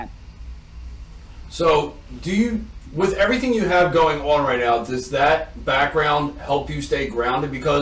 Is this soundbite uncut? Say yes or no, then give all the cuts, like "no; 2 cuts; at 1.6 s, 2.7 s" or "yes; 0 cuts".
yes; 0 cuts